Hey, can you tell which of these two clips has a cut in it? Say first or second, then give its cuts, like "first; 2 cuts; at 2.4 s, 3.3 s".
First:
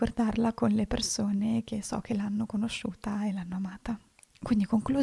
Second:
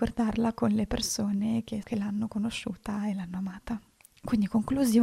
second; 1 cut; at 1.8 s